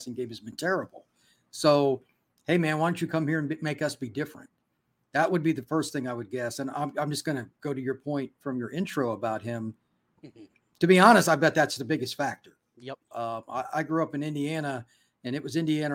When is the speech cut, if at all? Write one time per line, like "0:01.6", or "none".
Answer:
0:10.2
0:13.1